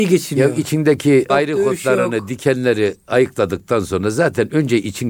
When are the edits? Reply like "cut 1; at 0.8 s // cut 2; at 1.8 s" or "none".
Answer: cut 1; at 1.3 s

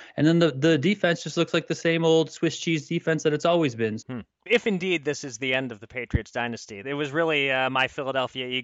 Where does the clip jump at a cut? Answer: cut 1; at 4.0 s // cut 2; at 6.8 s

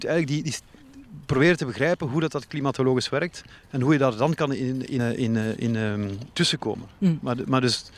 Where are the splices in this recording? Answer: cut 1; at 5.0 s // cut 2; at 6.3 s

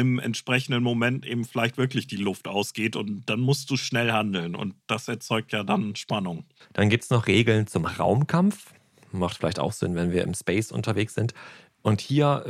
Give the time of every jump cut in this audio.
none

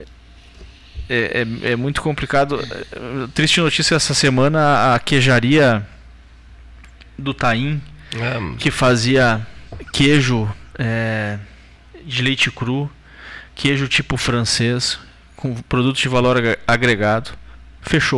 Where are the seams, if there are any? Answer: none

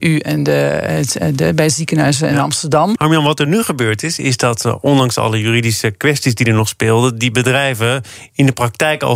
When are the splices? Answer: cut 1; at 3.0 s

